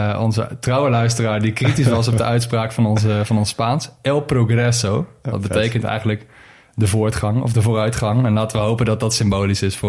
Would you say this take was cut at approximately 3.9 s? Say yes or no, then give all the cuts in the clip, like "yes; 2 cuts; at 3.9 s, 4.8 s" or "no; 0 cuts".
no; 0 cuts